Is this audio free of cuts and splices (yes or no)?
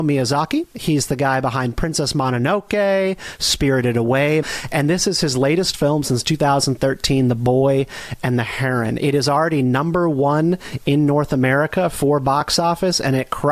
no